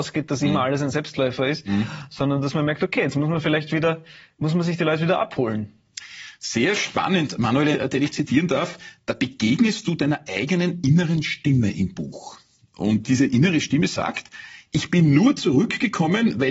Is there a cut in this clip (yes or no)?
yes